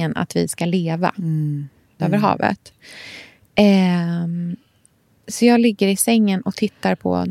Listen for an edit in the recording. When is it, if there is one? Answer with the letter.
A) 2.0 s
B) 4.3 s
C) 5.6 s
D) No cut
A